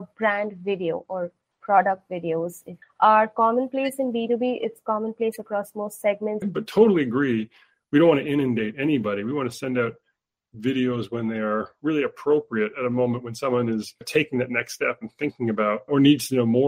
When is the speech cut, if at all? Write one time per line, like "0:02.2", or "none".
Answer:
0:02.8
0:06.4